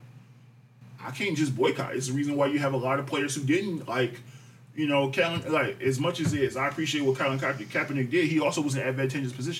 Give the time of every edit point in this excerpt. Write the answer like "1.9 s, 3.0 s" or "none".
none

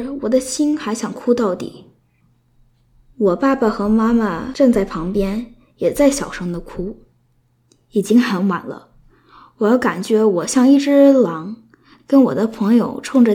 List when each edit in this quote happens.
none

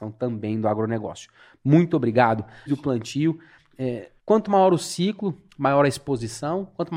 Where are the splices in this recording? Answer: 2.7 s, 4.2 s

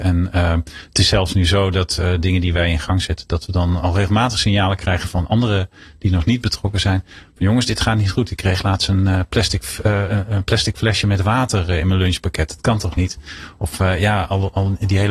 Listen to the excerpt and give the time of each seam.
none

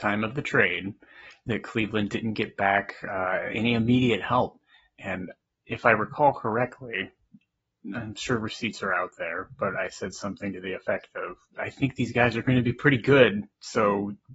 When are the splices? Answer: 11.5 s

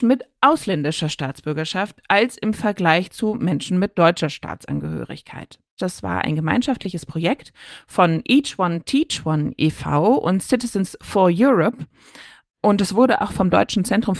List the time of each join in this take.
5.8 s

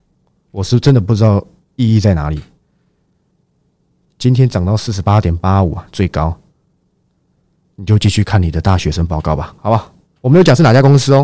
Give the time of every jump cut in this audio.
none

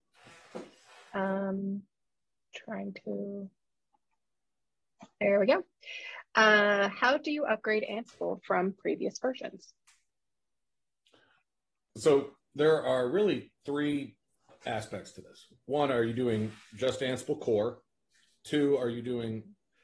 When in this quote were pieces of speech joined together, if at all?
none

